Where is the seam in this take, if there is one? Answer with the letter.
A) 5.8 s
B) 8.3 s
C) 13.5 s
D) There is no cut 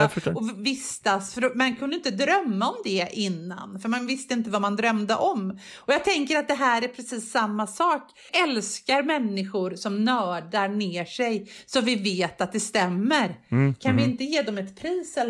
B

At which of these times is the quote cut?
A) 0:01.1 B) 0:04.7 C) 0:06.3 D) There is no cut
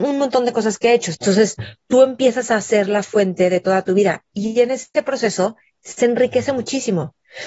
A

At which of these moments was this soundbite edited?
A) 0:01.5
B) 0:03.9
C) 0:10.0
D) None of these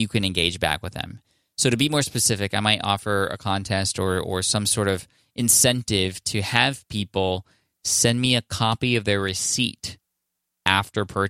D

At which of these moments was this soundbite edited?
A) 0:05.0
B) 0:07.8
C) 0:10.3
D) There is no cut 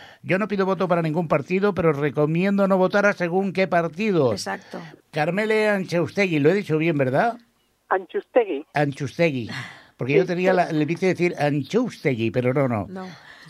A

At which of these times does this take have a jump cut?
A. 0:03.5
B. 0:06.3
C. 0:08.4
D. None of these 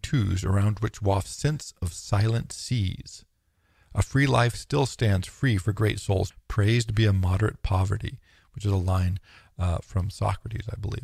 B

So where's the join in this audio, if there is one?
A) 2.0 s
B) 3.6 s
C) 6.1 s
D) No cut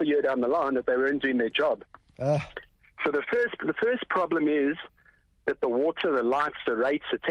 D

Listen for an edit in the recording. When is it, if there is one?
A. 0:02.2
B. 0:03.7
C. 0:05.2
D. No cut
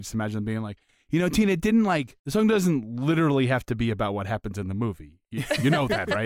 A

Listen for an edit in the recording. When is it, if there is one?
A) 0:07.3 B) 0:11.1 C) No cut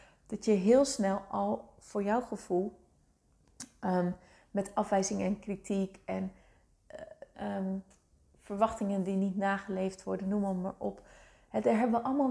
A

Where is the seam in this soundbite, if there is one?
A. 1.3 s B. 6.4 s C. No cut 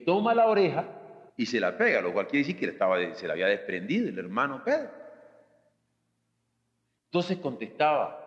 A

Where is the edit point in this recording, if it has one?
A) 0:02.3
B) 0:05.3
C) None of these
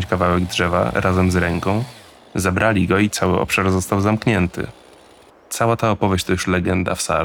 B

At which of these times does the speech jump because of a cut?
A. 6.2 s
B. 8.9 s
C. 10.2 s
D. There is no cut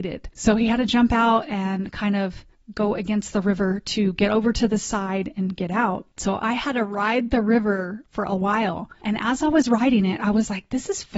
A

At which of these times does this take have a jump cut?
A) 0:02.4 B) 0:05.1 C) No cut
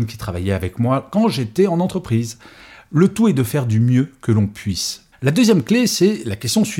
B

